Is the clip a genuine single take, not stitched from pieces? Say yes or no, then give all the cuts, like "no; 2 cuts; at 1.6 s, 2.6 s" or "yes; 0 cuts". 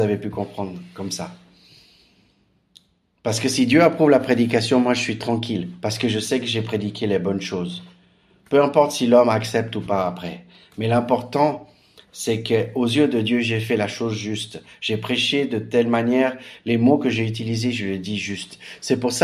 yes; 0 cuts